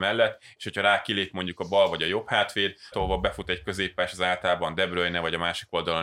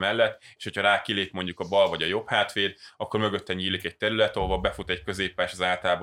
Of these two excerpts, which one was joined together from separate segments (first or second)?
first